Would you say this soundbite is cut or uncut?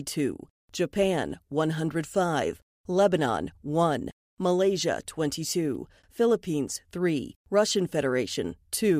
cut